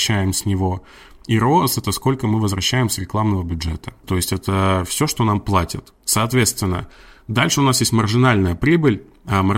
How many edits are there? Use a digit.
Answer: 1